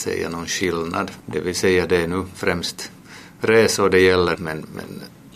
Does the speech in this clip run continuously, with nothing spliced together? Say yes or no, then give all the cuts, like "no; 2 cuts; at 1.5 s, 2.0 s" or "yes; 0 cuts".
no; 2 cuts; at 1.2 s, 4.4 s